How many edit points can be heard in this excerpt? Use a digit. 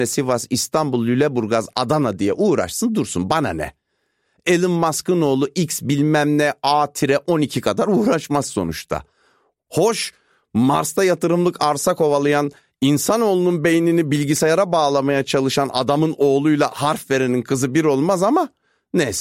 0